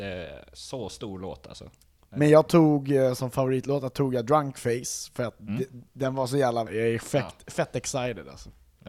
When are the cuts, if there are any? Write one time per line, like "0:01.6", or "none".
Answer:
0:06.7

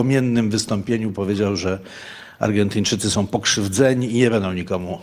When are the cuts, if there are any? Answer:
none

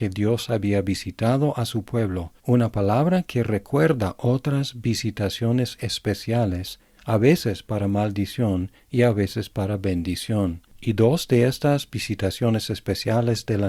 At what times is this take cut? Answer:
0:02.4

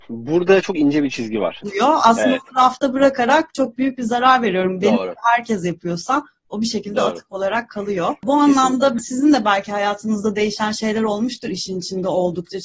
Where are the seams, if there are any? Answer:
0:01.6

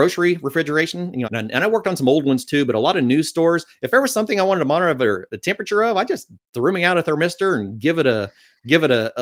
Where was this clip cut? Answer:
0:01.2

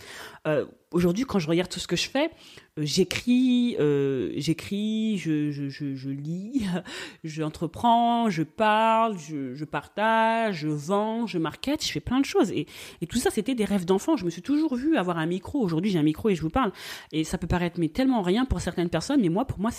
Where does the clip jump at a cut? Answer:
none

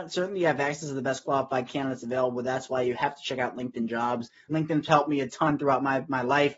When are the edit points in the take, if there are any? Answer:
0:04.5

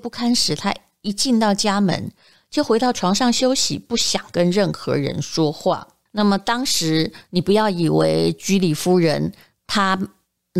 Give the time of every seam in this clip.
none

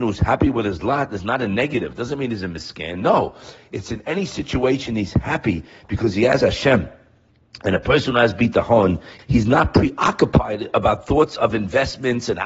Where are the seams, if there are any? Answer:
0:09.2

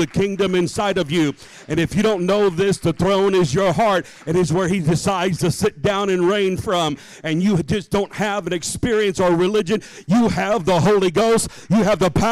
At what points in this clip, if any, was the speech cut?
none

